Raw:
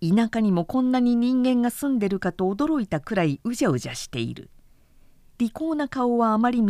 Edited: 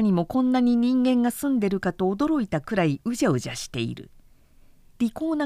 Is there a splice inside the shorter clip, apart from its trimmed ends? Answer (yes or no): no